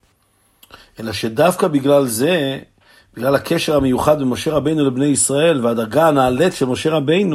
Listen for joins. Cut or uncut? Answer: uncut